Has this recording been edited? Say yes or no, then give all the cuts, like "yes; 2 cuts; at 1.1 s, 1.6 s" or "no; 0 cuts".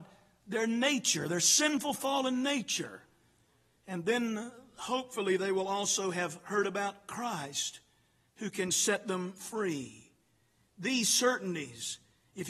no; 0 cuts